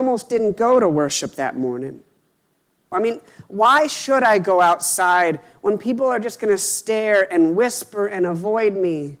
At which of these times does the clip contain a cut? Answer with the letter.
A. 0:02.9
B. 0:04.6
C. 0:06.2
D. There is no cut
A